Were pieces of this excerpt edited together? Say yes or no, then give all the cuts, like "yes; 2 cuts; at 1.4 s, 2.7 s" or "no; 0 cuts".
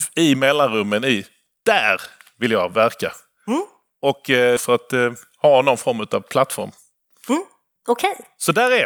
yes; 1 cut; at 4.6 s